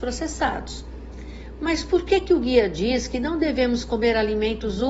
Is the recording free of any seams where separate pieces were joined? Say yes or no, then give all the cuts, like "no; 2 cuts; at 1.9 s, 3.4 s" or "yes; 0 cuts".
yes; 0 cuts